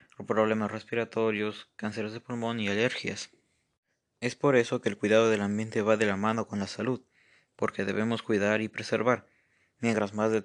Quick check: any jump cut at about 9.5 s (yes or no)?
no